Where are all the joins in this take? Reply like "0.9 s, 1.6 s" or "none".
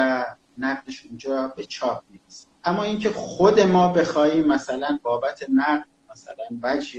2.6 s